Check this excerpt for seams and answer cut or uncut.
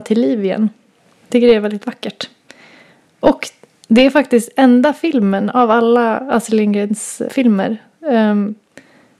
cut